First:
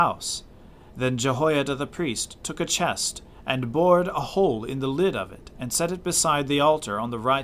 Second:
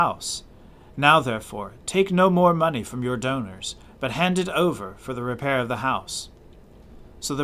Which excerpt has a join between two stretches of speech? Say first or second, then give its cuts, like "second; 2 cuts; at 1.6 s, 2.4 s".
first; 1 cut; at 0.9 s